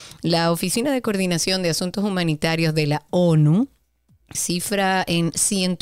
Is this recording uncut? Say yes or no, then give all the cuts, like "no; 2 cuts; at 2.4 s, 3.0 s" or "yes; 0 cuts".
no; 1 cut; at 4.3 s